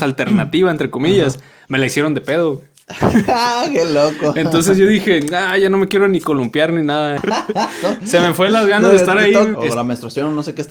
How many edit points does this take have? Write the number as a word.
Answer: two